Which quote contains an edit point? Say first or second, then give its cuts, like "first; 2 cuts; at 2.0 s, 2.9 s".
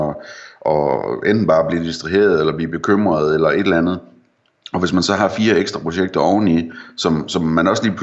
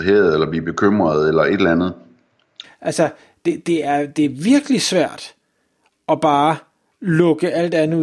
second; 1 cut; at 2.6 s